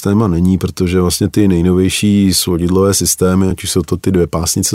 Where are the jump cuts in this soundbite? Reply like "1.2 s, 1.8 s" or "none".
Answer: none